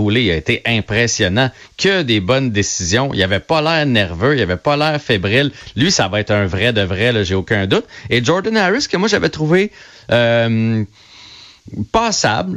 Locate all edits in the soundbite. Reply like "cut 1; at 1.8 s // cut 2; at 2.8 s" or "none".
none